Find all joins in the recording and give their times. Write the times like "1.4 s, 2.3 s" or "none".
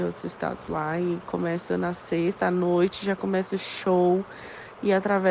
none